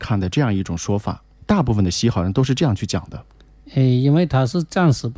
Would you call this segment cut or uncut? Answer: uncut